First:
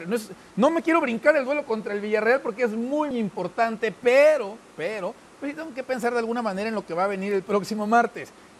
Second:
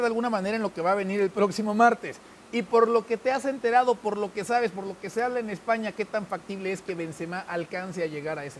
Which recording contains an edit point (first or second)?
first